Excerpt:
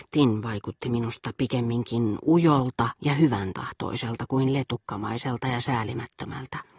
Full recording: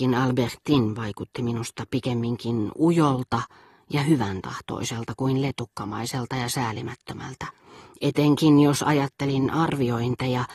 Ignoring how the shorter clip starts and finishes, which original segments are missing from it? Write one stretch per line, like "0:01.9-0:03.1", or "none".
0:03.5-0:03.8